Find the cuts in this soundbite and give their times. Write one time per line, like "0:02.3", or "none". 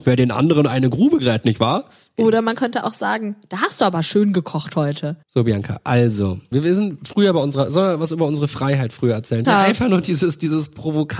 0:05.2
0:06.5
0:09.4